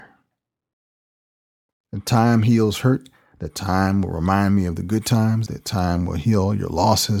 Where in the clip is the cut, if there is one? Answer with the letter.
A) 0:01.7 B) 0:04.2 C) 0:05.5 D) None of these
C